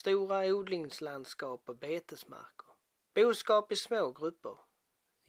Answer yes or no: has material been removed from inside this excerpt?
yes